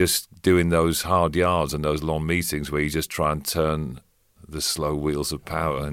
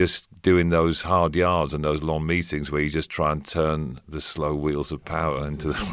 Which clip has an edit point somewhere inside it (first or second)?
second